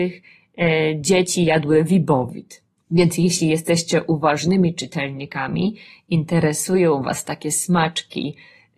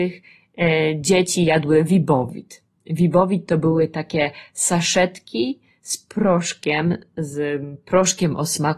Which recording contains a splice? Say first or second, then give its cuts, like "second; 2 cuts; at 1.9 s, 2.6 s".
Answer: first; 1 cut; at 2.8 s